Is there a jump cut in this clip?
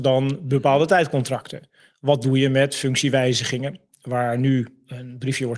no; 0 cuts

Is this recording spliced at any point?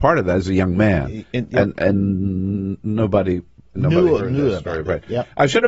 no; 0 cuts

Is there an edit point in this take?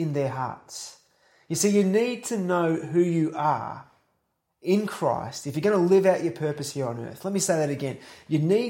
no; 0 cuts

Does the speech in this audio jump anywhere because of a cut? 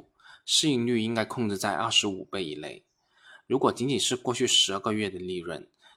no; 0 cuts

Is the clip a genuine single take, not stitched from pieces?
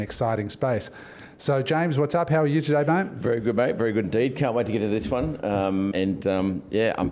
no; 1 cut; at 5.9 s

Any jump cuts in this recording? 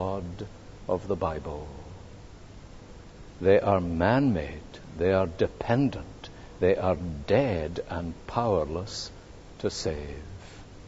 no; 0 cuts

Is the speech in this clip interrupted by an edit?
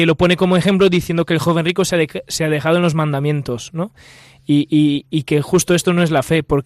no; 0 cuts

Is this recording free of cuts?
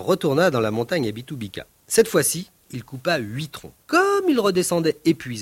no; 2 cuts; at 2.7 s, 3.8 s

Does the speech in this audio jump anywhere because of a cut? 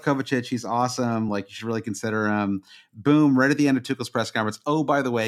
no; 0 cuts

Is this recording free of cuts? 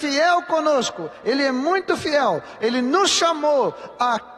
yes; 0 cuts

